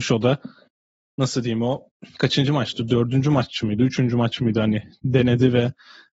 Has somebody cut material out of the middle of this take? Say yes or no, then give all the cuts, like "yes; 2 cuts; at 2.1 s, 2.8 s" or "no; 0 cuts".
yes; 1 cut; at 2.1 s